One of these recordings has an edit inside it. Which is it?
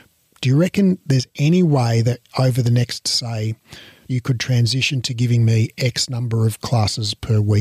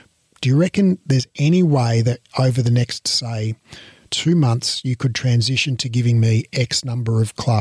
first; 1 cut; at 4.1 s

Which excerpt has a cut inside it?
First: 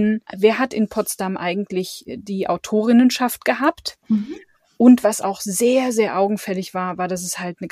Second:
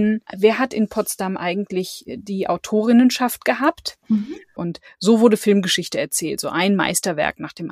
second; 1 cut; at 4.6 s

